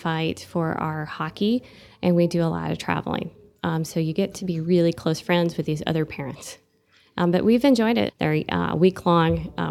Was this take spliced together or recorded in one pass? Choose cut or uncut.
cut